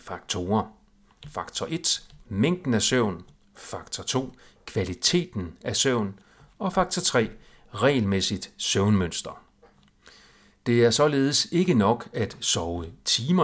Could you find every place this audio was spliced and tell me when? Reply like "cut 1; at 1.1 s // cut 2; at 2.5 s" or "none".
none